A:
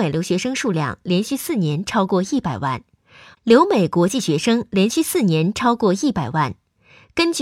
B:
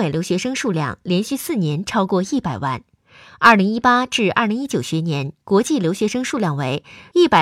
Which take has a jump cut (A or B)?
A